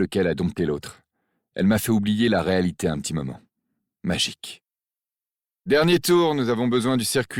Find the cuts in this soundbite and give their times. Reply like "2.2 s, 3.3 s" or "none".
5.5 s